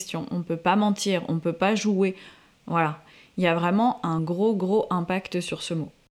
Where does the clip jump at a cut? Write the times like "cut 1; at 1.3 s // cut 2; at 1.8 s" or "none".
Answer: none